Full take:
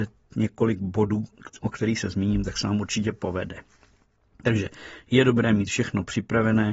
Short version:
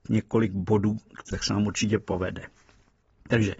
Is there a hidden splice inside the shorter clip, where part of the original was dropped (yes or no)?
yes